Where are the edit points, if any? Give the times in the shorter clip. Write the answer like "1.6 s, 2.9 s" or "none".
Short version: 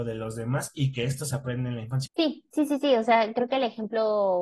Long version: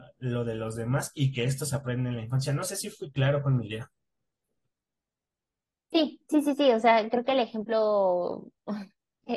2.1 s

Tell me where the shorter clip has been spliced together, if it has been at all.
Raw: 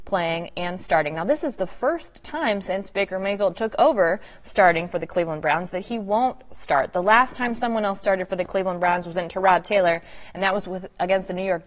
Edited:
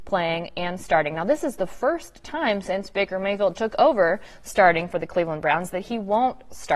none

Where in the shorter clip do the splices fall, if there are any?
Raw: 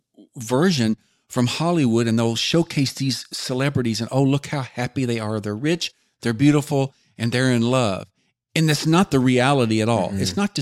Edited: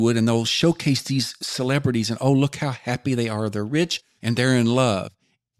4.2 s

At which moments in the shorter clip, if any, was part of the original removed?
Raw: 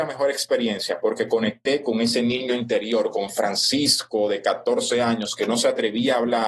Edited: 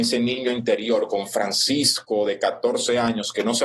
none

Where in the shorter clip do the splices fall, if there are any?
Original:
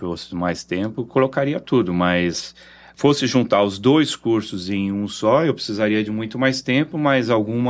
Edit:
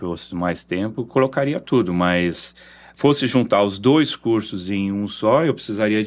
none

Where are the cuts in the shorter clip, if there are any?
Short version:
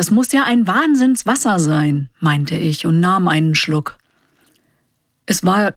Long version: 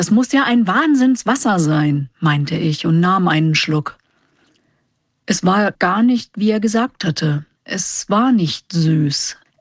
none

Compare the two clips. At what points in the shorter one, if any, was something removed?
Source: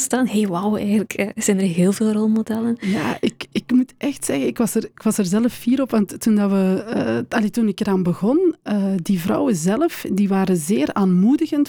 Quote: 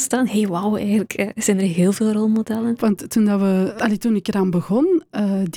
2.8 s, 3.8 s

